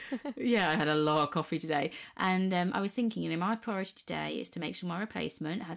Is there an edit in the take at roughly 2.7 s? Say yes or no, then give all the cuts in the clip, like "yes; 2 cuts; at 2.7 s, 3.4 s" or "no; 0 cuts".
no; 0 cuts